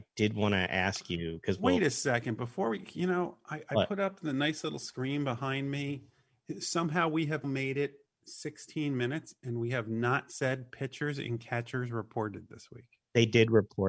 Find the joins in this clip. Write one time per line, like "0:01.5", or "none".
0:07.4

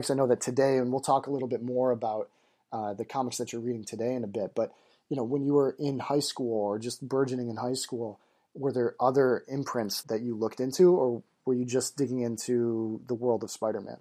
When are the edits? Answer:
0:10.0

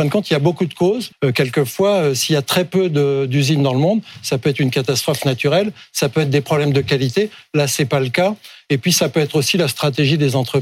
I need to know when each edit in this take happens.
0:01.1

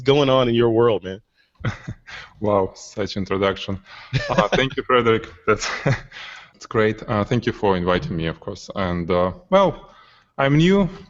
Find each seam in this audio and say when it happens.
none

